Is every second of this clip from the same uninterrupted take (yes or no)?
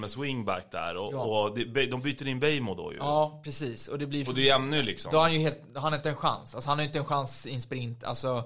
yes